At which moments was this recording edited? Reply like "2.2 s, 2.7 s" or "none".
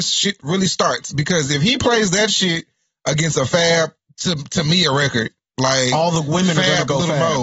none

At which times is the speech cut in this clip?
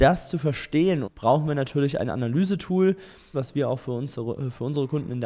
1.0 s, 3.3 s

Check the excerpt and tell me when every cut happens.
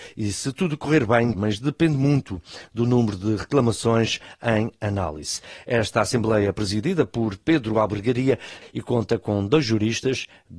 1.3 s, 8.6 s

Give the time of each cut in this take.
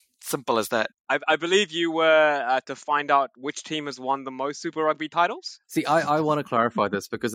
0.9 s, 2.6 s

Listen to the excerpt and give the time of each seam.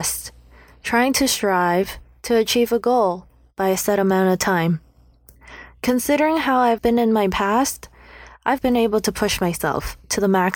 6.8 s, 8.6 s

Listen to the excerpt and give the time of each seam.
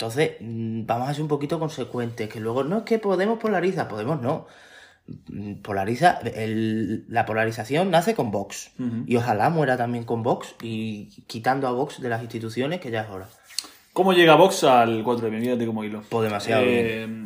none

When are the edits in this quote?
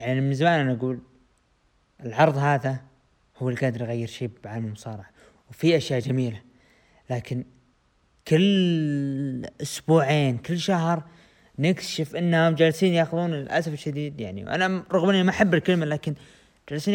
none

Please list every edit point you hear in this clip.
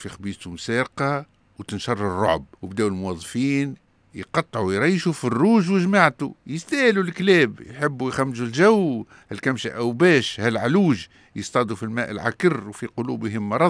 2.5 s, 6.4 s

